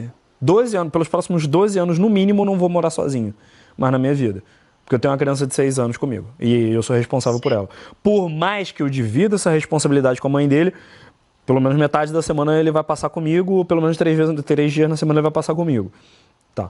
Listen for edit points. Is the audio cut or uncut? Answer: uncut